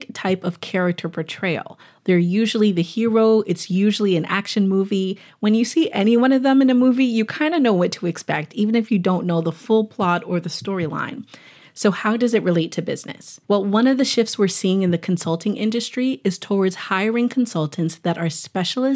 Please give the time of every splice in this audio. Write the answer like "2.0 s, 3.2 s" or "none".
11.6 s, 13.4 s